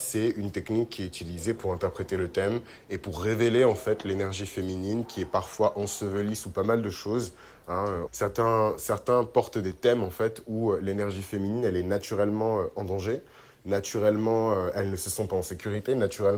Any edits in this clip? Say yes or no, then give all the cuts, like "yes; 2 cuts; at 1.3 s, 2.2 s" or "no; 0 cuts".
yes; 1 cut; at 8.1 s